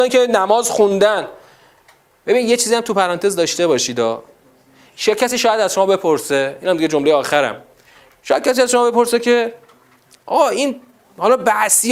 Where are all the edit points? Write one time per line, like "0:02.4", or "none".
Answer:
none